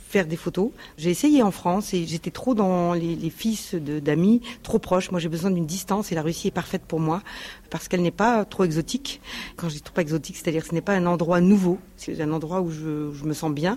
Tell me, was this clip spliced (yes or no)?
no